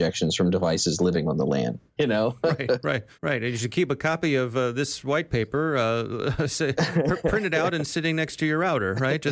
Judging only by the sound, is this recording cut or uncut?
cut